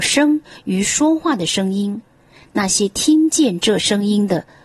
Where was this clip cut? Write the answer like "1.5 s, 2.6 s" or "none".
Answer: none